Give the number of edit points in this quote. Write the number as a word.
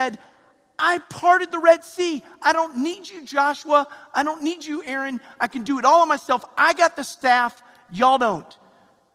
zero